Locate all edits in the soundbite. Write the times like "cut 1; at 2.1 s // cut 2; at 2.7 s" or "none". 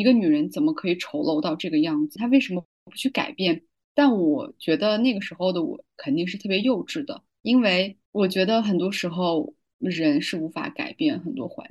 cut 1; at 2.2 s

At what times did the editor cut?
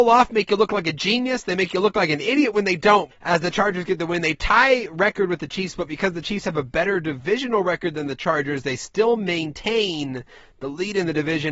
cut 1; at 3.1 s

